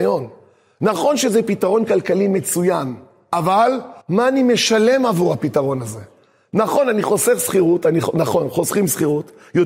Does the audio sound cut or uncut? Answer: cut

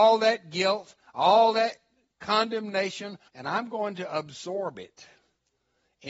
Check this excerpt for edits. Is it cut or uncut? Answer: cut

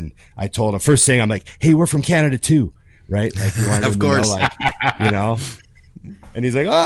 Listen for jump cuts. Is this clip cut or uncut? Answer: uncut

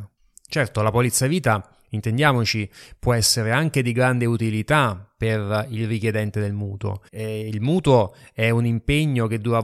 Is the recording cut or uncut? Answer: cut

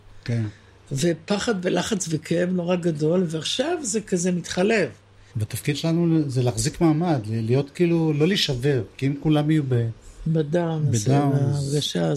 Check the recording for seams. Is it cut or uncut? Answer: cut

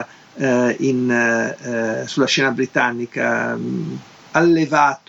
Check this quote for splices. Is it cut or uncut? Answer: uncut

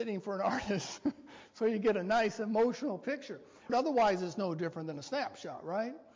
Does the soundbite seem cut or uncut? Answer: cut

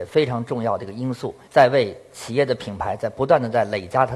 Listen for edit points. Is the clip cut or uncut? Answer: cut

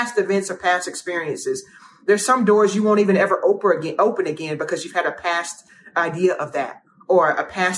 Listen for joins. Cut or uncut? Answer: uncut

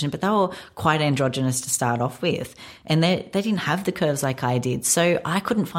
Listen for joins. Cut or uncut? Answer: uncut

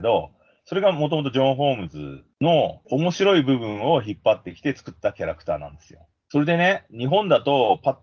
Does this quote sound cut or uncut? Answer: cut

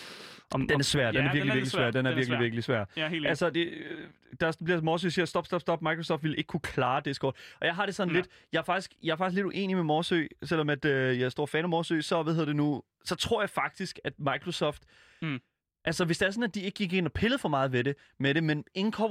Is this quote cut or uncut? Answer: uncut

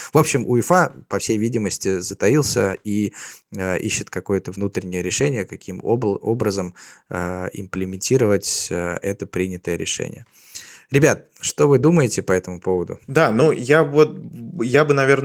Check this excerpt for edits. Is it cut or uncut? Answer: cut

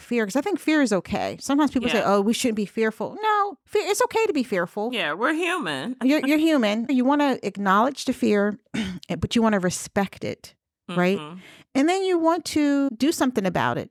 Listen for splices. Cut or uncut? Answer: uncut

